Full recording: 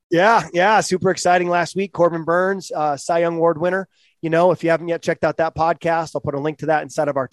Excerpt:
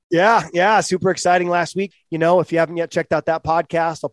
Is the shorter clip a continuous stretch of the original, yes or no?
no